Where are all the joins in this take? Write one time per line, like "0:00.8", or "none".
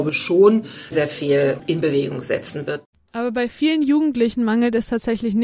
0:00.9